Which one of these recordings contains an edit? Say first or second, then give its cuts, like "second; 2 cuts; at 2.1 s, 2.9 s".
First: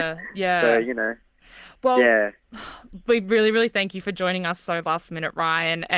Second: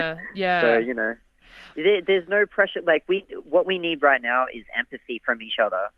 second; 1 cut; at 1.7 s